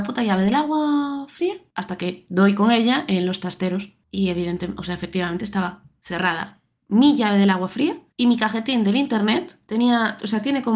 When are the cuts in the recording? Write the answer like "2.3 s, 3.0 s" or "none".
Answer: none